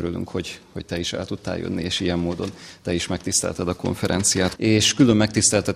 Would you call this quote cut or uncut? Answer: cut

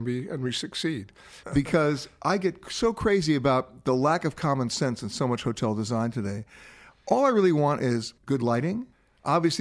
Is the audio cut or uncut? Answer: cut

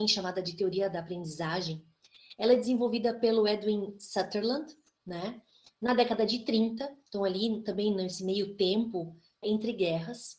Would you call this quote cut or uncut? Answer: cut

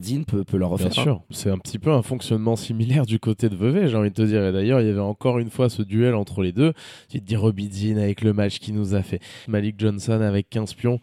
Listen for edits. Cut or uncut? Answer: cut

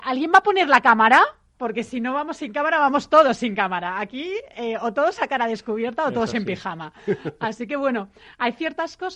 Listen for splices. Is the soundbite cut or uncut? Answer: uncut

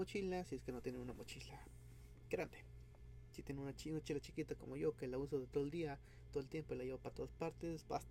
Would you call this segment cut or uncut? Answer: uncut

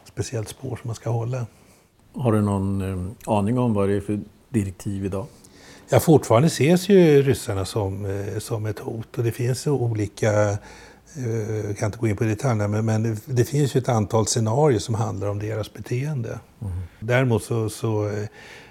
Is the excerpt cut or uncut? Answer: uncut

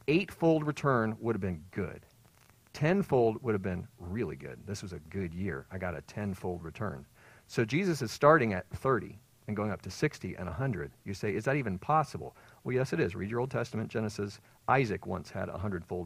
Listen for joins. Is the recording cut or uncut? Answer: uncut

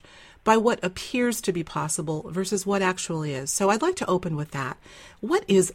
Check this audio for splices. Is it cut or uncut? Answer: uncut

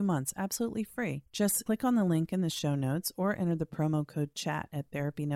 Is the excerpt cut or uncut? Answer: uncut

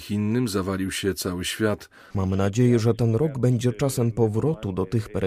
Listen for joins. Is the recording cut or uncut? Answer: cut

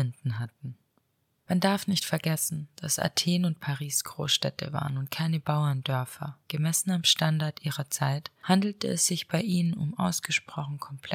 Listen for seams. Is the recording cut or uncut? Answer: uncut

